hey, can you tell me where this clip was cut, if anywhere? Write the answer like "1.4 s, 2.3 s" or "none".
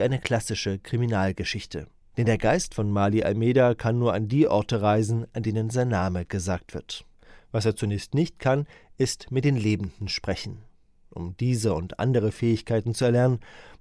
2.1 s